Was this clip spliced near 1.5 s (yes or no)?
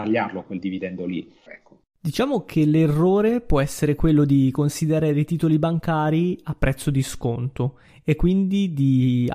yes